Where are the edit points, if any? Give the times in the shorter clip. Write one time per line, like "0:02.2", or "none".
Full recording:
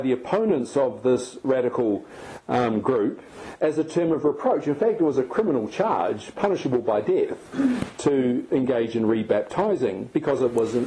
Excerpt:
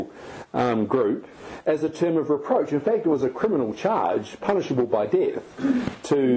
none

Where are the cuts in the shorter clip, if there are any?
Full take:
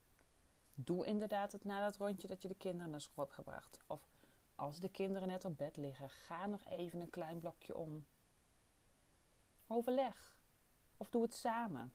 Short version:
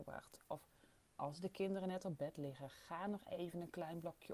none

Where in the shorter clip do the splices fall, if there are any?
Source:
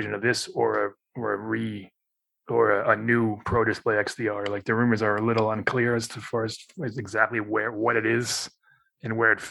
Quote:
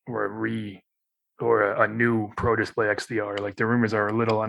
none

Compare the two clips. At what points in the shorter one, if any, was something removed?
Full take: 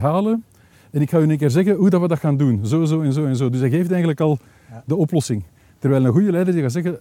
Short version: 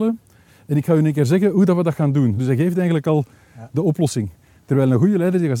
0:02.4

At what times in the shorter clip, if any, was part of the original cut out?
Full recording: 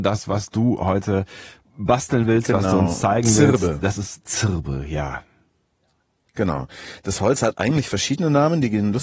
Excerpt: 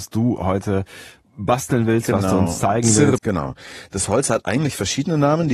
0:03.2

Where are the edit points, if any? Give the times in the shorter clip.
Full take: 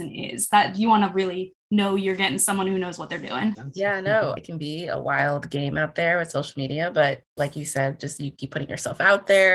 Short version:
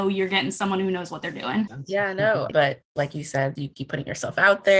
0:02.5
0:03.6

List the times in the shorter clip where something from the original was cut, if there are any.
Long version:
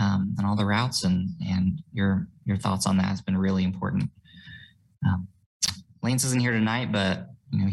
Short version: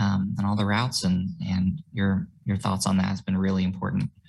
none

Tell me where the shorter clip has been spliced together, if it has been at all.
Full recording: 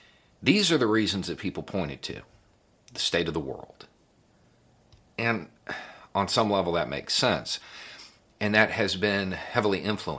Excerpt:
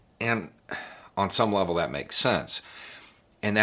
none

